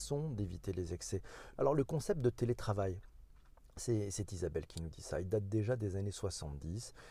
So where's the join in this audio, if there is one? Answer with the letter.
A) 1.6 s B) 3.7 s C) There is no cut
A